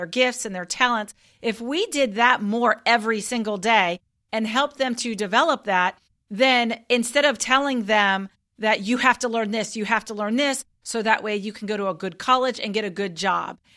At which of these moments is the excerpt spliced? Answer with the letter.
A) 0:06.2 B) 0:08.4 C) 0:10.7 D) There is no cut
D